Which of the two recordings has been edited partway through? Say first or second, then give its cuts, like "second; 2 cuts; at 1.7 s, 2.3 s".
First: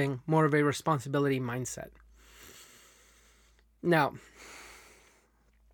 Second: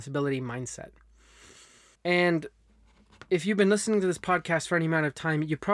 second; 1 cut; at 1.9 s